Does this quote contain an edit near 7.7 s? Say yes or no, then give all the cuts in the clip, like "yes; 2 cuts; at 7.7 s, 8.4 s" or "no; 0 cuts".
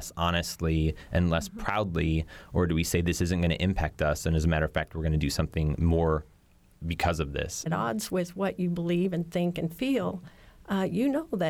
yes; 1 cut; at 7.7 s